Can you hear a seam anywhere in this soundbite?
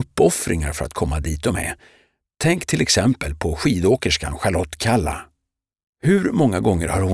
no; 0 cuts

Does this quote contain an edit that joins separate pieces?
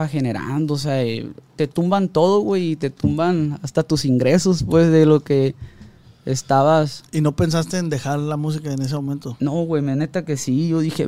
no; 0 cuts

